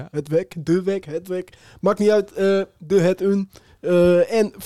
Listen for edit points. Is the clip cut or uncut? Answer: uncut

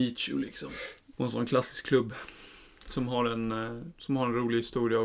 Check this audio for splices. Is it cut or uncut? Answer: cut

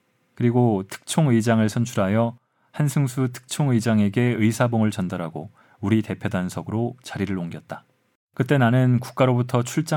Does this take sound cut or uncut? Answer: cut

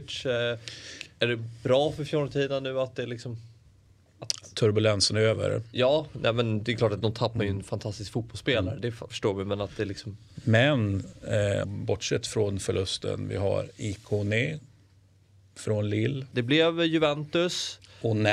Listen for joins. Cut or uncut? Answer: cut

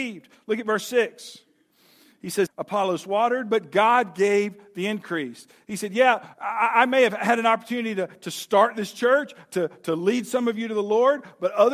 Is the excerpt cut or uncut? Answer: cut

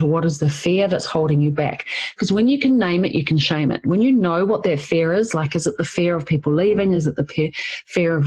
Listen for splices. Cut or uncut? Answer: uncut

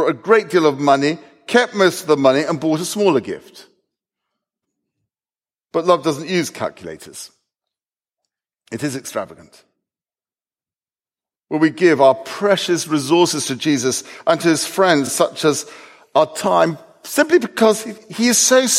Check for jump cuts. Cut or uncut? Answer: uncut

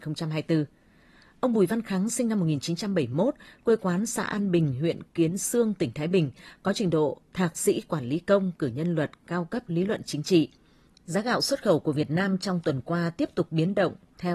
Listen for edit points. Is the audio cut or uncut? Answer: cut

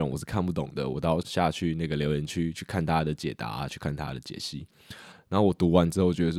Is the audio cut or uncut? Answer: cut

